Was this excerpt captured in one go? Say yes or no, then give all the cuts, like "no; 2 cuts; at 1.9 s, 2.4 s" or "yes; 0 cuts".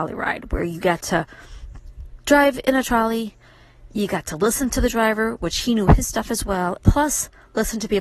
no; 1 cut; at 6.8 s